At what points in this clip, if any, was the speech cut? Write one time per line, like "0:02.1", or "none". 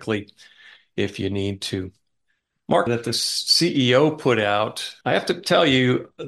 0:02.9
0:05.0